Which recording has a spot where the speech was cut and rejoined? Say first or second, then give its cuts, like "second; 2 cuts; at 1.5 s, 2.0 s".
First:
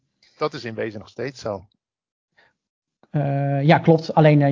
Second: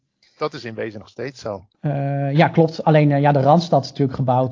second; 1 cut; at 1.7 s